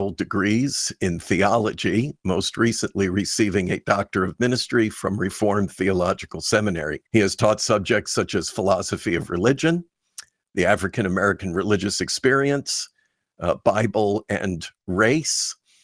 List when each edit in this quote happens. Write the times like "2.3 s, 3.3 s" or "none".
7.1 s